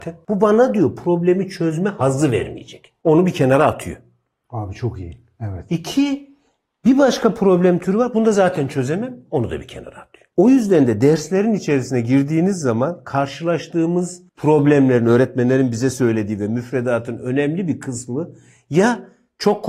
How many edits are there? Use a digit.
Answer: 1